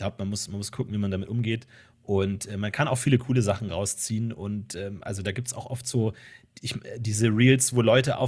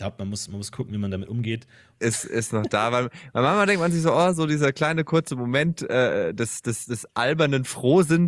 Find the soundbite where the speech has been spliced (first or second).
second